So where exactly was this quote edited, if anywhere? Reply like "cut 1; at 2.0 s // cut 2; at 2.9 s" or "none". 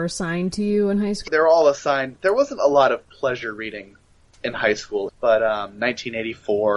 cut 1; at 1.3 s // cut 2; at 5.1 s